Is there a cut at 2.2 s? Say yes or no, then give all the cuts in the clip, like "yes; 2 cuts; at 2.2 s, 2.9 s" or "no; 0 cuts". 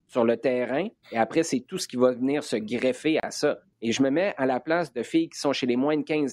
no; 2 cuts; at 1.0 s, 3.7 s